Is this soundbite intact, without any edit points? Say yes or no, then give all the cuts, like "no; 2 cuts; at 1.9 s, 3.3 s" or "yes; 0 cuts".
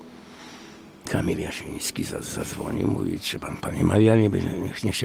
yes; 0 cuts